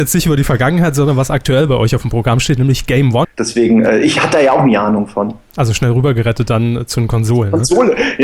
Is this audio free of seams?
no; 1 cut; at 3.2 s

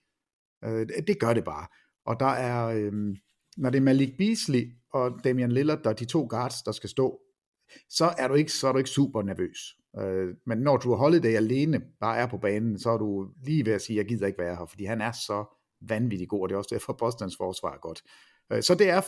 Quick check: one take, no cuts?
no; 1 cut; at 13.3 s

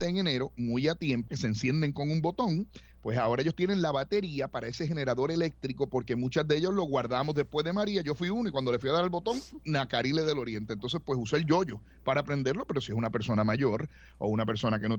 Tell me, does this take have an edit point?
yes; 1 cut; at 1.3 s

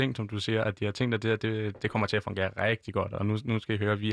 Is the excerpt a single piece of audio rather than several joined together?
yes; 0 cuts

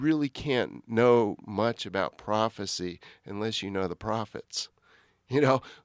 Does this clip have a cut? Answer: no; 0 cuts

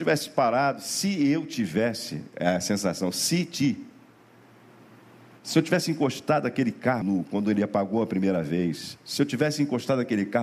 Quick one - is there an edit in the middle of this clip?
yes; 1 cut; at 7.0 s

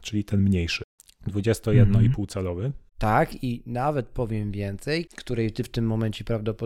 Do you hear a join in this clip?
yes; 2 cuts; at 2.9 s, 5.1 s

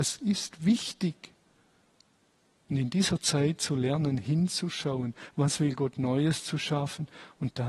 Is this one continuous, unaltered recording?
yes; 0 cuts

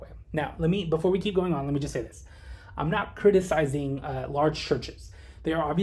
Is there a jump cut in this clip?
no; 0 cuts

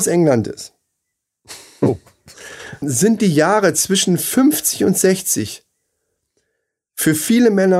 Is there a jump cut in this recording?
yes; 1 cut; at 2.8 s

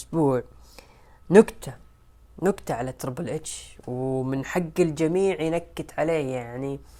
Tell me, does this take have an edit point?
no; 0 cuts

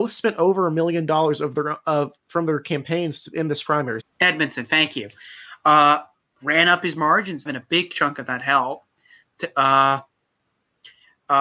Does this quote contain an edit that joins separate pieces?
yes; 2 cuts; at 4.0 s, 7.5 s

